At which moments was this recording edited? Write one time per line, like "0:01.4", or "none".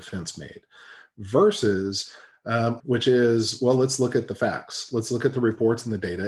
0:02.8

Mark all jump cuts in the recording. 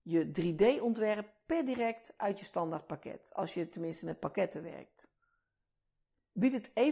none

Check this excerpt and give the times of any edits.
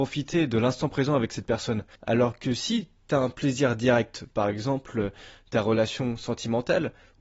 0:02.0

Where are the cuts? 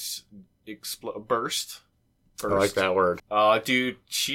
0:03.2

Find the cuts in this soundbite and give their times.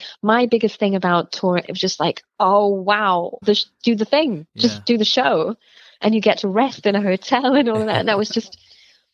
0:01.6
0:03.4

